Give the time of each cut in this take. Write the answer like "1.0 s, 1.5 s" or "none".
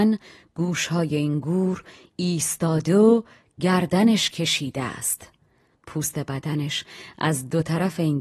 5.7 s